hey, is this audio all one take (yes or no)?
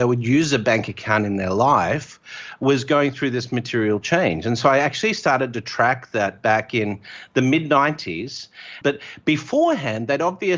no